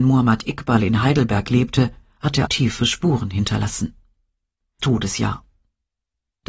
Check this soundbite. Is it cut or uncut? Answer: cut